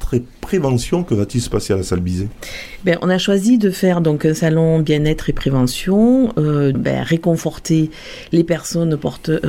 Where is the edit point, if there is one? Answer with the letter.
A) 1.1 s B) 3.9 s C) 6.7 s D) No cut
C